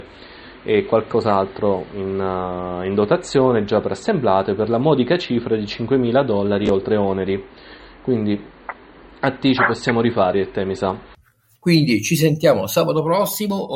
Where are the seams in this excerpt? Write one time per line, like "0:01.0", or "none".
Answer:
0:11.6

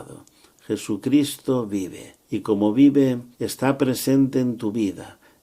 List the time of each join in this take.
0:02.2
0:03.3

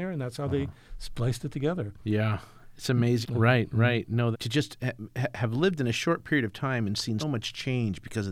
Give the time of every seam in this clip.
0:03.2
0:04.3
0:07.2

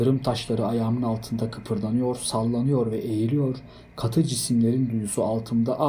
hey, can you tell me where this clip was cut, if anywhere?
none

